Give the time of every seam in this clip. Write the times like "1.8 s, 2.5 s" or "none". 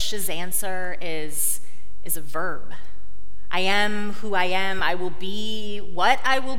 none